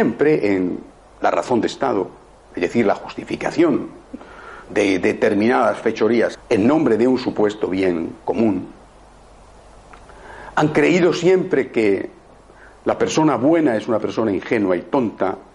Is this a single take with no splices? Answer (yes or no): no